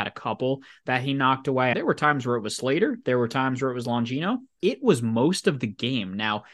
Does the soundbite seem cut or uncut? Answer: cut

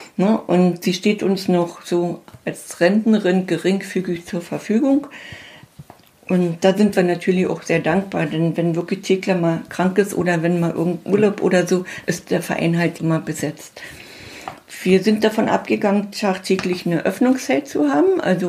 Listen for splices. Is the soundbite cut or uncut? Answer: cut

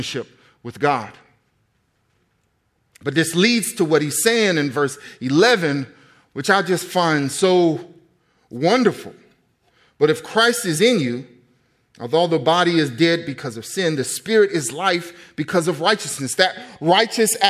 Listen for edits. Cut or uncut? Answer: uncut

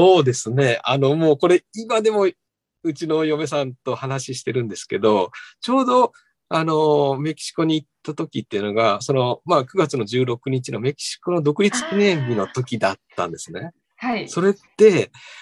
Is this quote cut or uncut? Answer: uncut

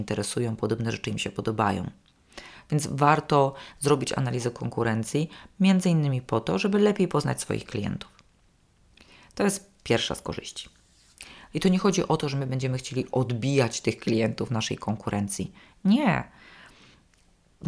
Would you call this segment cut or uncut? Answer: cut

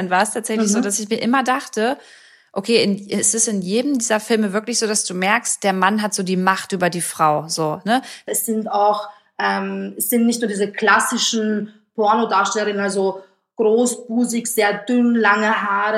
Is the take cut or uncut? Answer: cut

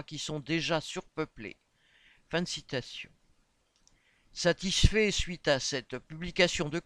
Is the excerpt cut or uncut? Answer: uncut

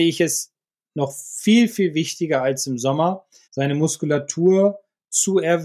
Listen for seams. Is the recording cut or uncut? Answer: cut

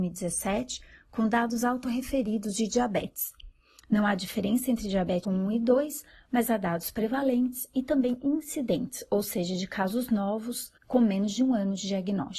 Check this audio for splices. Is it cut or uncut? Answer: cut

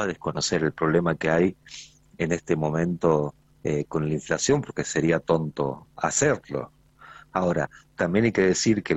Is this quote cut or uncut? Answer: uncut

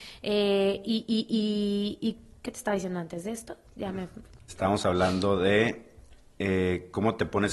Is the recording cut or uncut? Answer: uncut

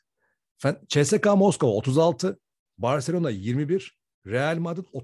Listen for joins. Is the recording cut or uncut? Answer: cut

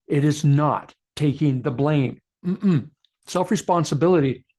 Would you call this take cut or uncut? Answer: uncut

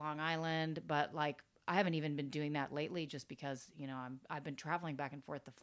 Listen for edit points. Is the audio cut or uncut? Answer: uncut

